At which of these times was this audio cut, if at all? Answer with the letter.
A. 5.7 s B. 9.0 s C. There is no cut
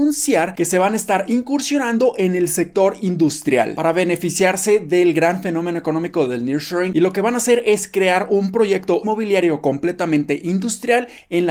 B